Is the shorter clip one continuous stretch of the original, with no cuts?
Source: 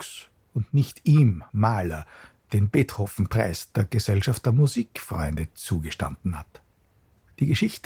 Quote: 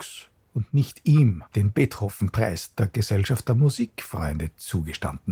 no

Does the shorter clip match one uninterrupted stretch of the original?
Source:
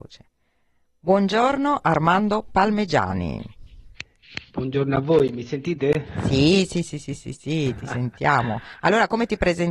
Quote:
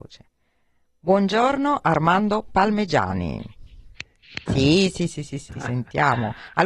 no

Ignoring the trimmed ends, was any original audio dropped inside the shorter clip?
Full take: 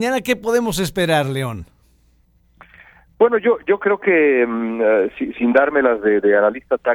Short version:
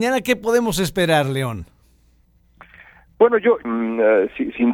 yes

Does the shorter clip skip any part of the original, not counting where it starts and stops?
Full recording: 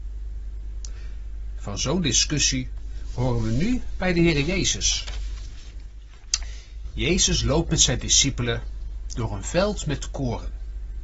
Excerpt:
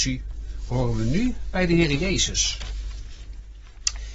no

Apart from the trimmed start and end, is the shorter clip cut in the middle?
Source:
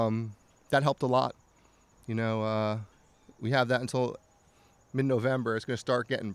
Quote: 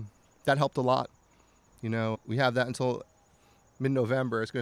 yes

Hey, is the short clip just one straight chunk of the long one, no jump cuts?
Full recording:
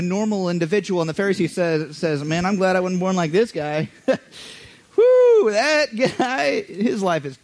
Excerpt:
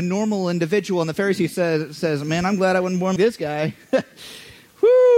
no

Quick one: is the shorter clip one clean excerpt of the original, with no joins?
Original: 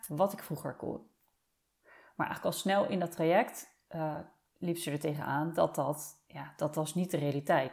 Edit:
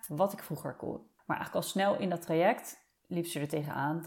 no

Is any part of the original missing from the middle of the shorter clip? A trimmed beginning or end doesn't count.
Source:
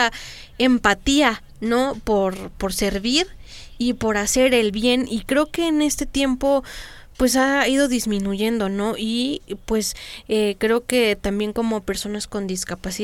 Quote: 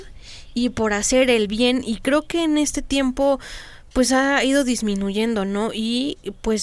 no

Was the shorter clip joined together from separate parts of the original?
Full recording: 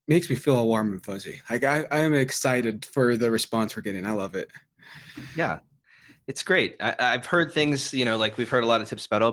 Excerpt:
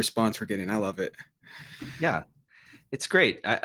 no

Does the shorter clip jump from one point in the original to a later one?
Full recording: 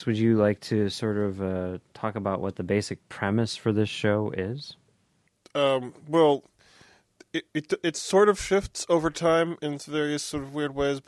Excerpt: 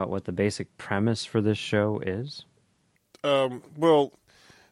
no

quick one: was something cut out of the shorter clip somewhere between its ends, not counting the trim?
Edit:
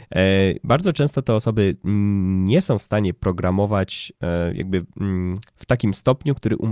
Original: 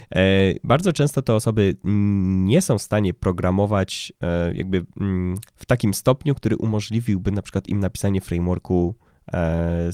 no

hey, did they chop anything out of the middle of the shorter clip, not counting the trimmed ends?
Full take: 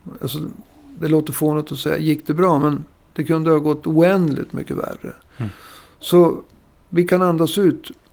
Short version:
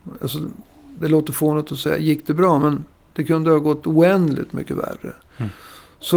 no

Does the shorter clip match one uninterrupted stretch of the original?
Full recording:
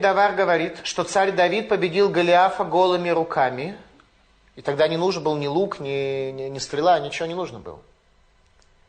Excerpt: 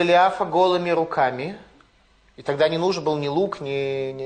yes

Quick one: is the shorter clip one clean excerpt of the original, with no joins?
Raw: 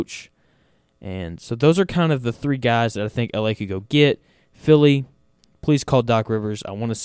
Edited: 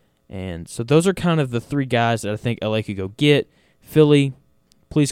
yes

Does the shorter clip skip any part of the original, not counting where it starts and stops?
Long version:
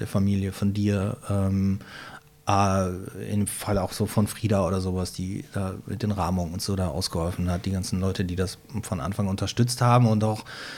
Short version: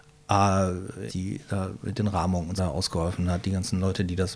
yes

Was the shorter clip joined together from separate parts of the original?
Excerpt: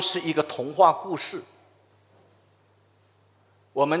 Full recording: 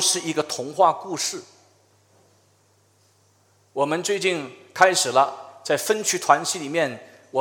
no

